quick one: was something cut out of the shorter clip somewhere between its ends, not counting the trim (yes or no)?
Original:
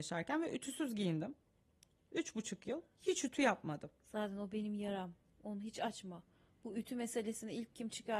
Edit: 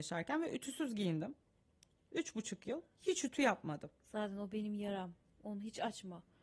no